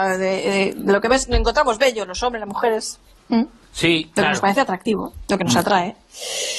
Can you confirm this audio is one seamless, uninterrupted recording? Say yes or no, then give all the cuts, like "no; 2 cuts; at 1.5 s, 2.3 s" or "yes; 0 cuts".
yes; 0 cuts